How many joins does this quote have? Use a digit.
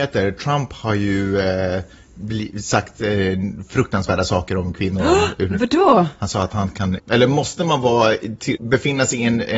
2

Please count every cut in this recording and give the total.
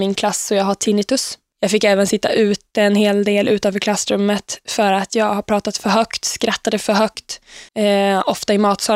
2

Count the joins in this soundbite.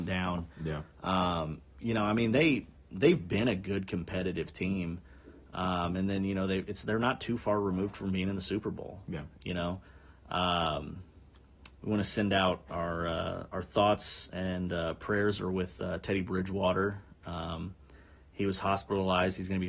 1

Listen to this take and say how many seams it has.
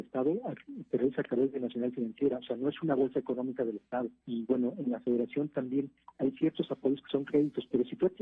1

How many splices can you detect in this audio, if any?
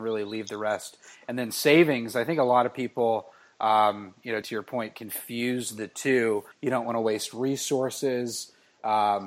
2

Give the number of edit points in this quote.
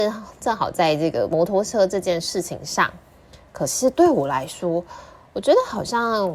0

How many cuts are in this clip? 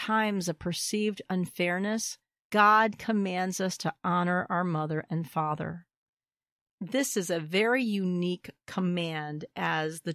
1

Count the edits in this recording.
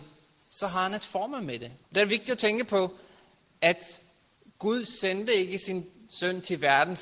1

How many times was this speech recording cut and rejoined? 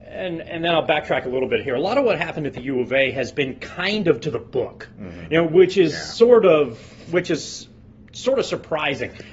0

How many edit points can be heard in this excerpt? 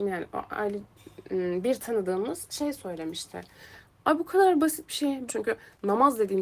2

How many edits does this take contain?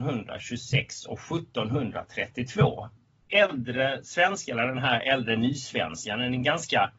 0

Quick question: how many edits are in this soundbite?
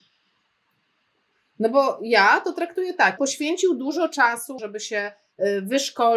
2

